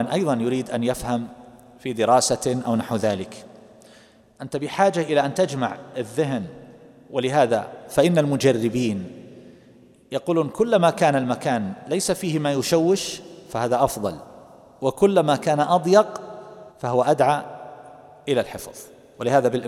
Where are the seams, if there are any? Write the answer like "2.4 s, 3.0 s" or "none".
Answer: 16.7 s